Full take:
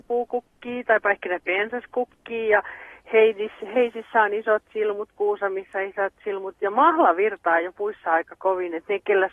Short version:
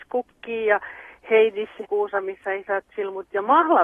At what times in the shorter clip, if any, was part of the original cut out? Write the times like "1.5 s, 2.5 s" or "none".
1.8 s